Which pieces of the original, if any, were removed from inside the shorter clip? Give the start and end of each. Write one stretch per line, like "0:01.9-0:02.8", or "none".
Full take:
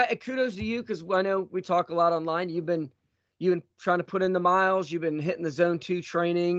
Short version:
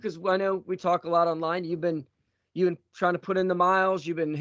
none